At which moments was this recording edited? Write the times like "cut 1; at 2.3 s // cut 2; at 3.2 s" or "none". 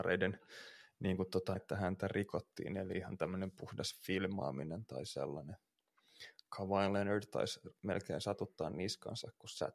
cut 1; at 1.5 s